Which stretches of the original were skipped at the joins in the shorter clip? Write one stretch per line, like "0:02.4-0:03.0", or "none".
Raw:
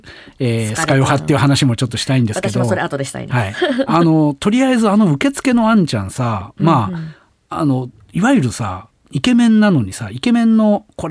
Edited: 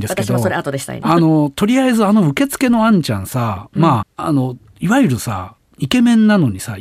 0:03.3-0:03.9
0:06.9-0:07.3